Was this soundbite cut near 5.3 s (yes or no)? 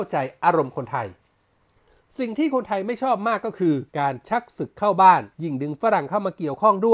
yes